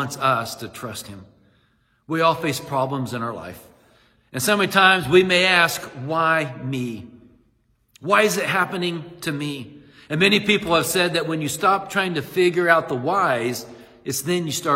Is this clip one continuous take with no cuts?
yes; 0 cuts

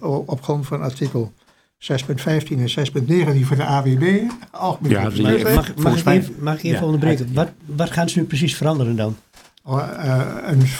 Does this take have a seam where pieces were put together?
no; 0 cuts

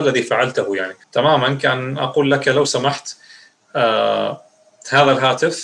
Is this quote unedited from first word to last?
no; 1 cut; at 1.0 s

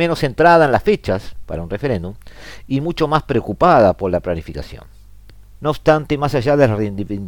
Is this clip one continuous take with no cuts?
no; 1 cut; at 5.6 s

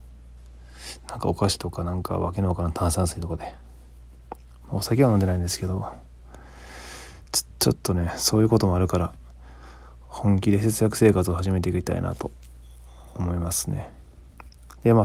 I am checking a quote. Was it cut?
no; 0 cuts

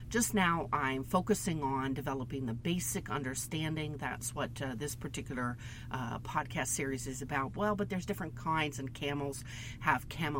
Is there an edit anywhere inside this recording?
yes; 1 cut; at 7.5 s

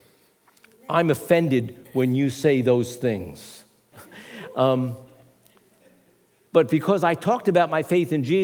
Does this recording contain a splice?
yes; 2 cuts; at 3.9 s, 6.4 s

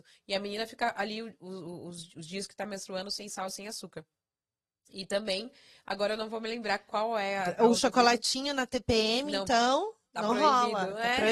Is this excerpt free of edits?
yes; 0 cuts

